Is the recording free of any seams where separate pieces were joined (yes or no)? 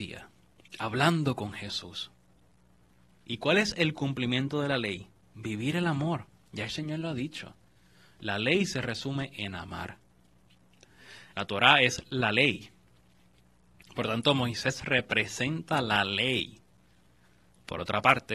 no